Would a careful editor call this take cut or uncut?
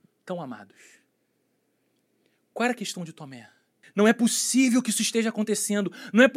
cut